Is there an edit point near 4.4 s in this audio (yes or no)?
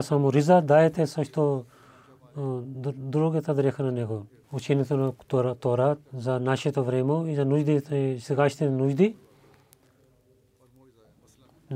yes